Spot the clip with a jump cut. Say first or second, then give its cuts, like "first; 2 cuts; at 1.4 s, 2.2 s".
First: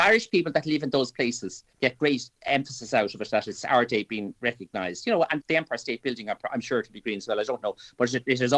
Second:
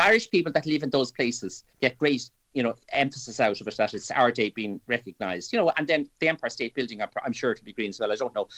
first; 2 cuts; at 2.4 s, 5.4 s